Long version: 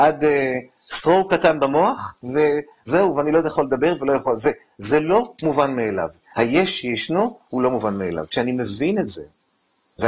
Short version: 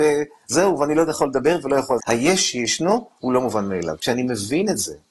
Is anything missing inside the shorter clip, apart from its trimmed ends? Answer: yes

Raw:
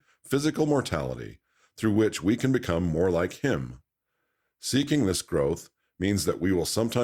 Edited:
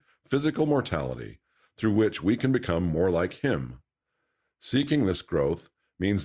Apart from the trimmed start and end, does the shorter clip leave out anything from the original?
no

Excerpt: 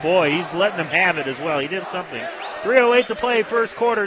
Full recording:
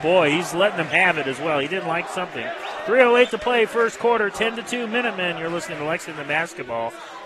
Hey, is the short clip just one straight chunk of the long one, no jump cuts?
no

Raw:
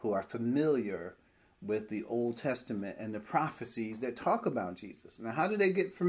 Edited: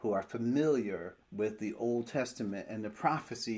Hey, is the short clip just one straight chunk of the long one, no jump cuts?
no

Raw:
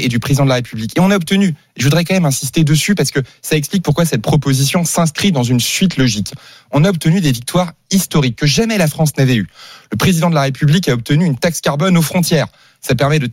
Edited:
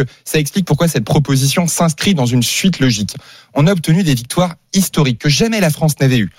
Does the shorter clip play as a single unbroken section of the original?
yes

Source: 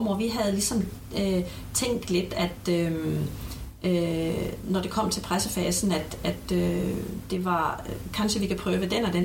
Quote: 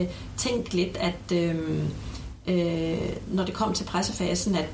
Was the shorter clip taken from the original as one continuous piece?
yes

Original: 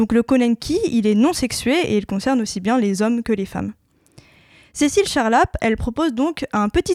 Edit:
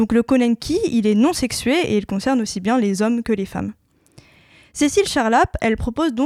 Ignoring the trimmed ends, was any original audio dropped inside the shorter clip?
no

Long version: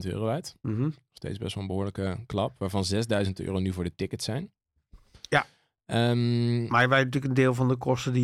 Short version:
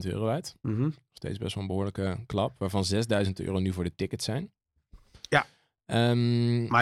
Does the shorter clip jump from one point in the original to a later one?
no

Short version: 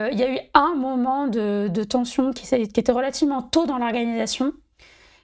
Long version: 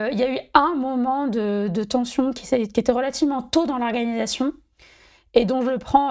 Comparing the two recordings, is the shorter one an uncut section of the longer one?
yes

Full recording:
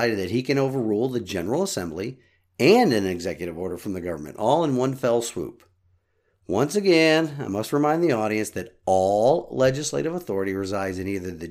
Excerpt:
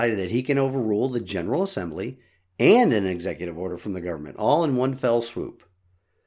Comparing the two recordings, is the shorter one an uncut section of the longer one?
yes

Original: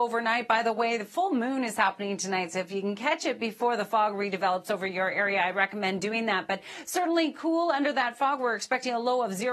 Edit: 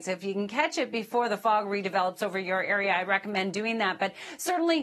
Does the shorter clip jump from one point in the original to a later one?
no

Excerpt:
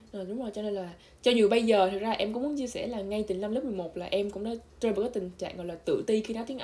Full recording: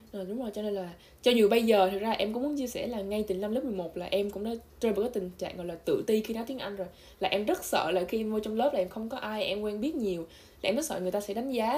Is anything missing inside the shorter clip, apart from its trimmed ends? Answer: no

